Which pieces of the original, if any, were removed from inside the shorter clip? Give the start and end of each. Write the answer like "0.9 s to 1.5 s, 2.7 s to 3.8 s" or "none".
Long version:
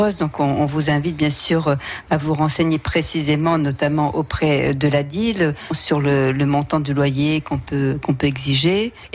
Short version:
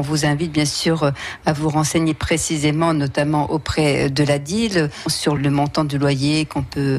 6.0 s to 6.3 s